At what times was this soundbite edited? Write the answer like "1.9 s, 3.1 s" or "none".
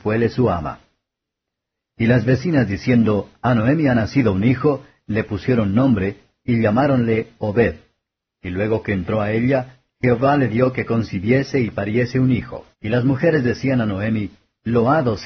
8.3 s, 12.7 s